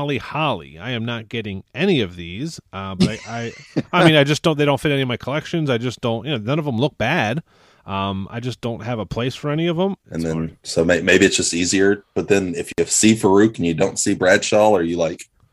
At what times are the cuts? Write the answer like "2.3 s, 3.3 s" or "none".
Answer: 10.0 s